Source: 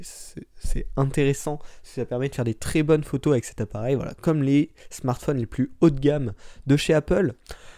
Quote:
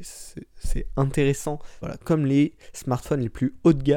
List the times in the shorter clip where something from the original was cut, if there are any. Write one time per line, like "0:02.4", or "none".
0:01.8